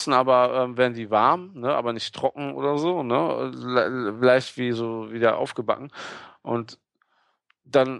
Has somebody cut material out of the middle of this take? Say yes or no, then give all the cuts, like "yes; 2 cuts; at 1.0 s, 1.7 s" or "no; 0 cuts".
no; 0 cuts